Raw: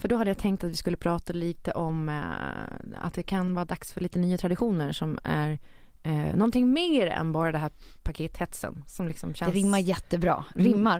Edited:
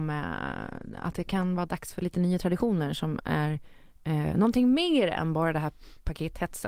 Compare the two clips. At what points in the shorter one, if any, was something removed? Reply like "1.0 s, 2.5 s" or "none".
none

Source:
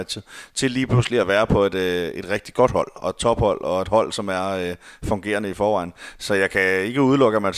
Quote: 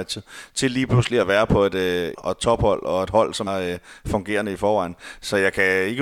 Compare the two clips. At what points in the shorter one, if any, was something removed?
2.1 s, 3.5 s

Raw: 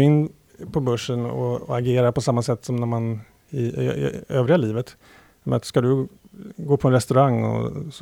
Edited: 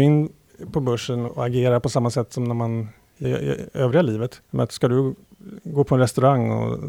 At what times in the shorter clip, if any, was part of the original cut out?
1.3 s, 3.2 s, 4.5 s

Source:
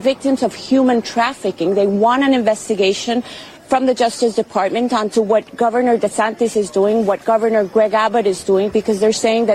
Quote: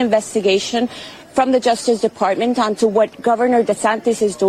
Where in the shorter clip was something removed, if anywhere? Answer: none

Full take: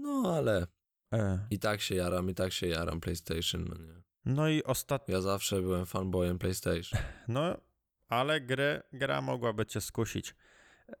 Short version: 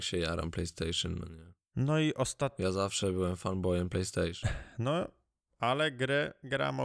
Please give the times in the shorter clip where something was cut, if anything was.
none

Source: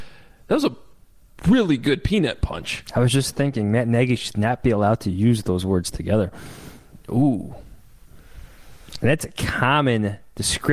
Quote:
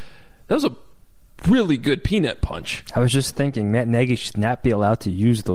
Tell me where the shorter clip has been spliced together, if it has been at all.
none

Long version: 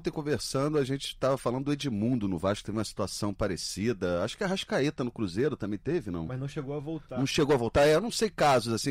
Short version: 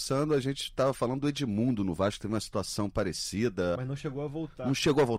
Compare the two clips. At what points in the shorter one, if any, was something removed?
3.8 s

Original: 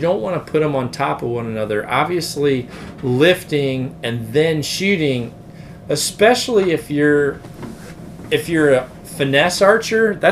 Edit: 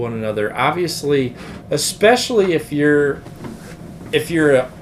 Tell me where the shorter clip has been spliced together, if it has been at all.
1.6 s

